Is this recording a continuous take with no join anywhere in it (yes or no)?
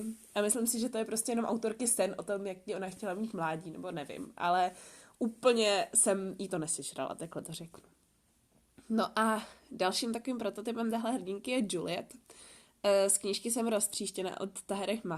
yes